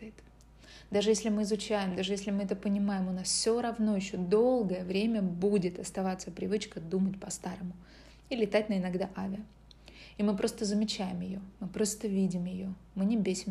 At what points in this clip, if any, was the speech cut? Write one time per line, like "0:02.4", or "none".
none